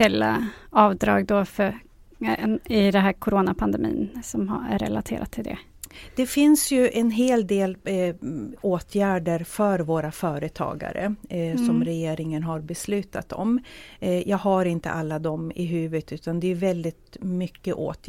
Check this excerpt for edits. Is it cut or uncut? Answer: uncut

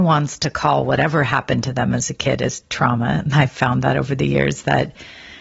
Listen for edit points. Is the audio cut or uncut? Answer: uncut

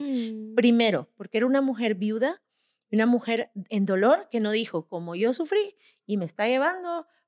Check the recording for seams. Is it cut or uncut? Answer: cut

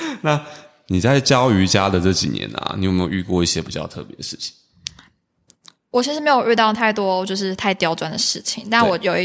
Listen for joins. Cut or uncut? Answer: uncut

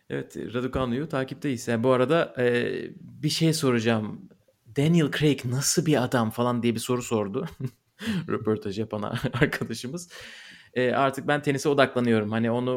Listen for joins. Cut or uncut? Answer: uncut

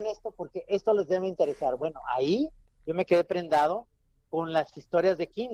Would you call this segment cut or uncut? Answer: uncut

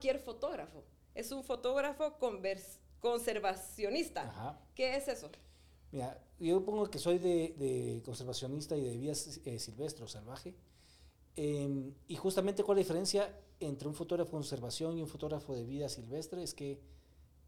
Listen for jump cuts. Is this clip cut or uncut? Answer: uncut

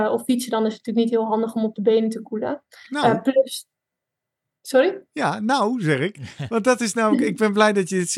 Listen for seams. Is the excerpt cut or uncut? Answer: uncut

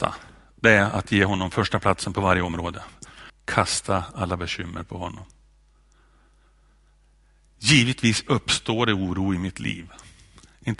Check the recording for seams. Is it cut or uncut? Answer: cut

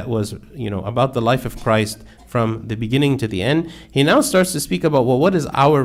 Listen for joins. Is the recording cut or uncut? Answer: uncut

